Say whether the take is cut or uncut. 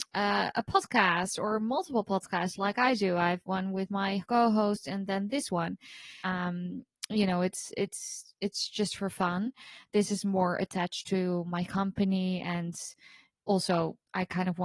cut